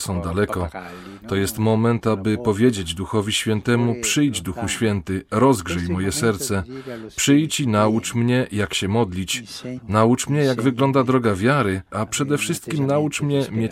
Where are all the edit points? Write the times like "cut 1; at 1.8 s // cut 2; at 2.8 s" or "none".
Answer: cut 1; at 9.8 s // cut 2; at 11.9 s